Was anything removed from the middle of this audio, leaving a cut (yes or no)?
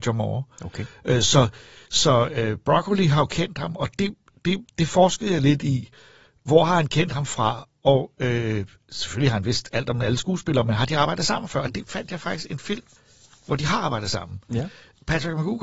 no